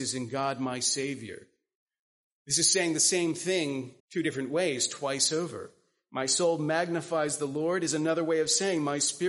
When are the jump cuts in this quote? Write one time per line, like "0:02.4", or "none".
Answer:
0:04.0